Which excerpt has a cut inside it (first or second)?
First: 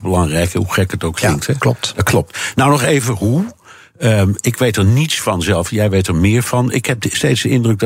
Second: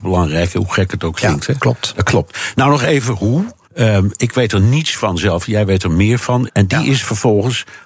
second